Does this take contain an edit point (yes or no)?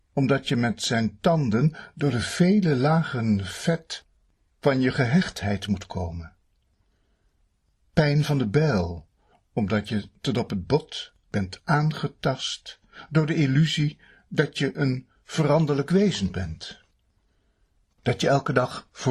no